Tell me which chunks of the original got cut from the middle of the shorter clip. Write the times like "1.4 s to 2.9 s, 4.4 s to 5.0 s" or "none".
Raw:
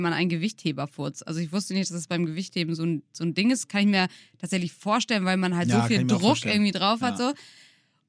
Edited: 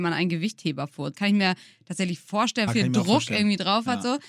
1.1 s to 3.7 s, 5.2 s to 5.8 s